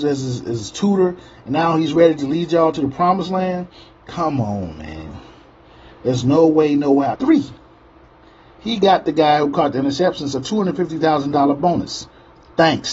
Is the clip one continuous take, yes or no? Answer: no